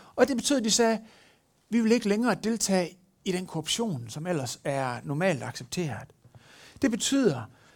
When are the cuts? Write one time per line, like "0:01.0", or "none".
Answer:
none